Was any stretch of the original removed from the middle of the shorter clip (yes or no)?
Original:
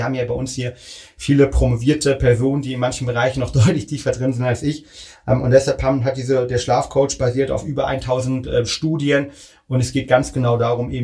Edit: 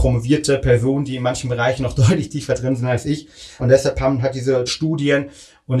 yes